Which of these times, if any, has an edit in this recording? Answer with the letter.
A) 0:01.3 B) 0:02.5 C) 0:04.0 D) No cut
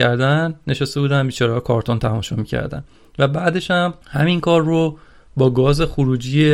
C